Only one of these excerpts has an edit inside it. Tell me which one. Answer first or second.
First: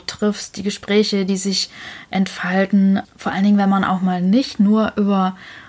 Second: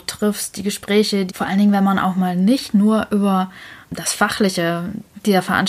second